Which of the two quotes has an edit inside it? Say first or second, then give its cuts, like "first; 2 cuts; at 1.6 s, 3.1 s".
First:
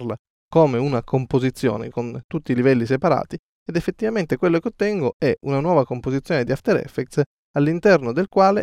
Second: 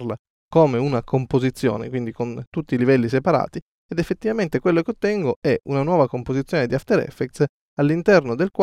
first; 1 cut; at 1.9 s